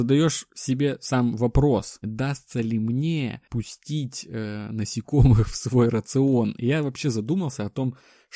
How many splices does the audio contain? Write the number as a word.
one